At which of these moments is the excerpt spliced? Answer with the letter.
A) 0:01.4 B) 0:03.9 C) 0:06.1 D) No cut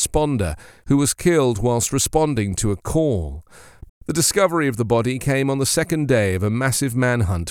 B